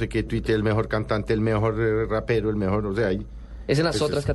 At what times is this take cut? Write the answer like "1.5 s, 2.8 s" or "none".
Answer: none